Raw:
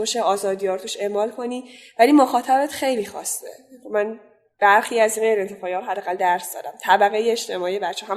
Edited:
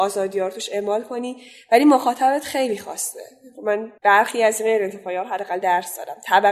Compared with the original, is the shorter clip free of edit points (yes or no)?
no